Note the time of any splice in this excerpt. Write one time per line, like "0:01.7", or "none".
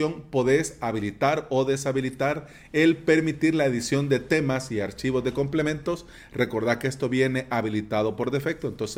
none